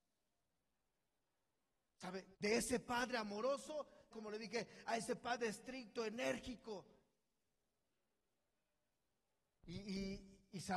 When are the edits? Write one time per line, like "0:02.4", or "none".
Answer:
0:02.3
0:04.1